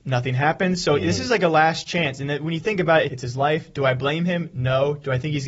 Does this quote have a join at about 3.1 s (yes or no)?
yes